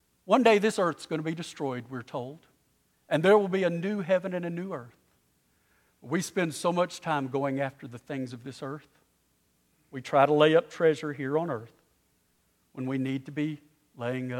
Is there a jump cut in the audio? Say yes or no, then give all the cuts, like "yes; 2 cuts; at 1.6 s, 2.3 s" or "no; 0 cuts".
no; 0 cuts